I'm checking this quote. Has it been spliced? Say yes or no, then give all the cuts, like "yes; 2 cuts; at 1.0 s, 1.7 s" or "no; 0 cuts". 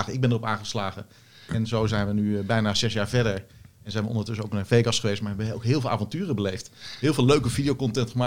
no; 0 cuts